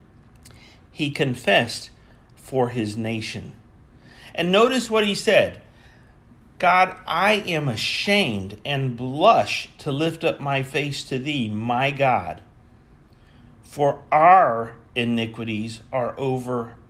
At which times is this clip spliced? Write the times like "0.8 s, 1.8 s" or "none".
none

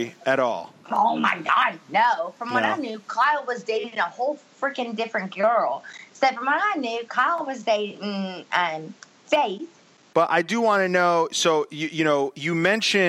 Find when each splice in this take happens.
10.1 s

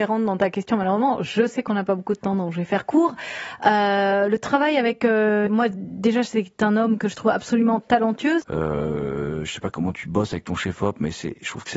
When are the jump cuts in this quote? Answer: 5.5 s, 8.4 s

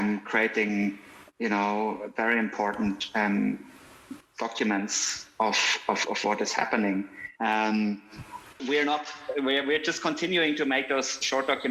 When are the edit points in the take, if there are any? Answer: 8.6 s

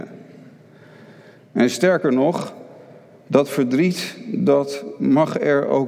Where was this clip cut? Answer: none

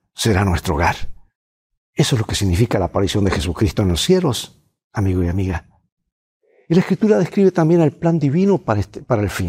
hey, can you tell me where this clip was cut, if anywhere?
none

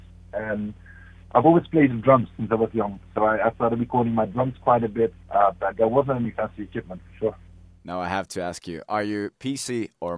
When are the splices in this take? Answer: none

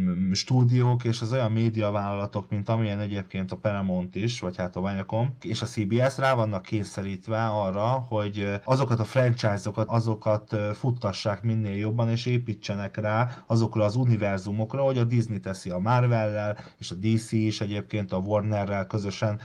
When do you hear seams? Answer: 9.9 s

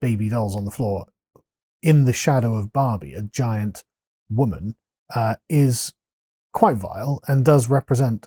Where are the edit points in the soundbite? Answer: none

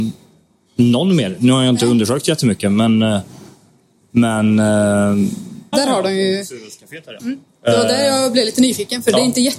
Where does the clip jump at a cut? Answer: 5.7 s, 7.2 s

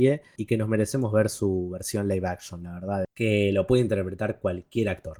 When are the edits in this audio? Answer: 3.0 s

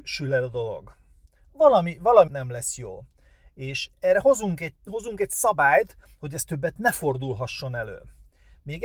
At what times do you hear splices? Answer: 2.3 s, 4.8 s

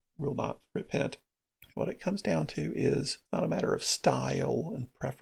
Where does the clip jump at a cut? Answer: 1.7 s, 3.3 s

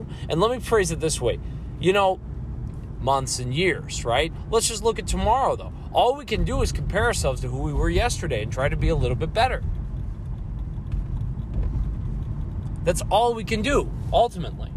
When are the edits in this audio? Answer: 3.0 s

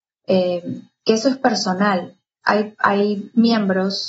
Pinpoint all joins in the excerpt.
2.4 s

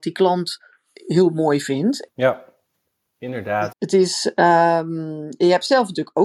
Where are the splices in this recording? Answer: 2.1 s, 3.7 s

